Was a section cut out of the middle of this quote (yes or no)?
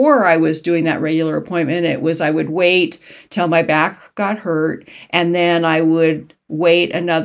no